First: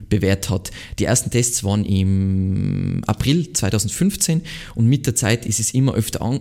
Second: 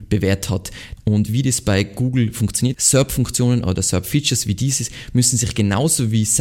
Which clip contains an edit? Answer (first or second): second